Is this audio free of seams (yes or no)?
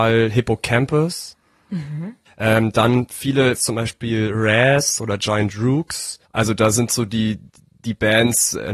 no